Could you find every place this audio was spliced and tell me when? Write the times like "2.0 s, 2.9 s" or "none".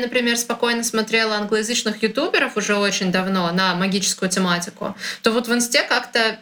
none